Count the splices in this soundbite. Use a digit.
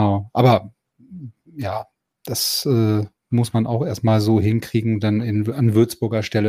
0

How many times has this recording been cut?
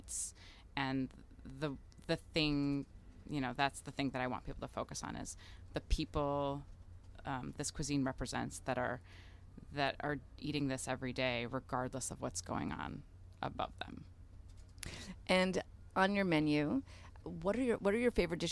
3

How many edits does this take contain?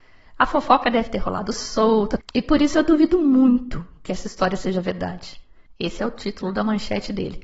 2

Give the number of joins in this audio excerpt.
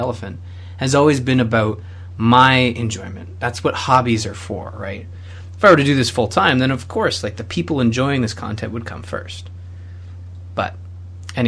0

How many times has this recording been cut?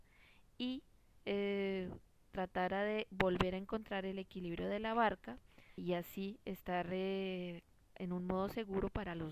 1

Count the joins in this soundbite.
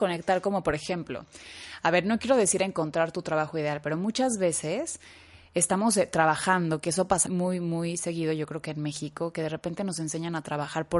1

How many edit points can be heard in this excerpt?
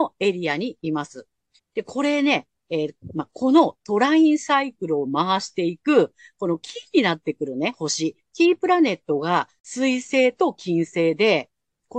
2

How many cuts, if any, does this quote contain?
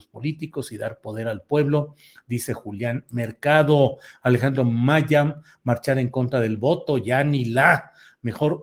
0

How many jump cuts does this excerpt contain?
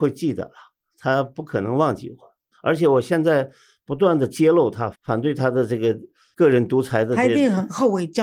1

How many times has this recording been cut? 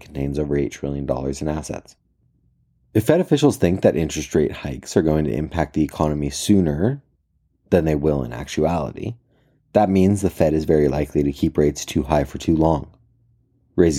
0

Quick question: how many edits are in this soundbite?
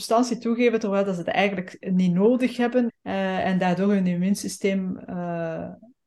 1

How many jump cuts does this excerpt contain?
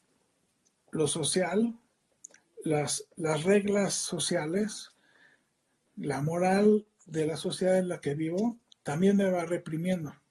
0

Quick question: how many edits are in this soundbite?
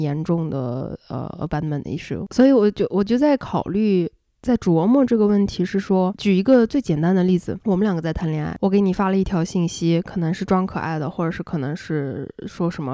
0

